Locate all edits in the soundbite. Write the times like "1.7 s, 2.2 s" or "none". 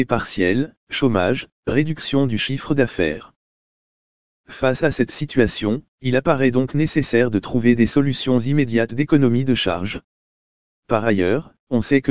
10.7 s